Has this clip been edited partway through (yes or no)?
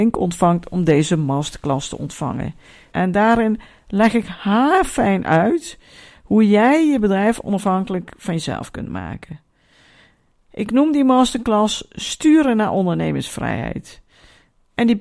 yes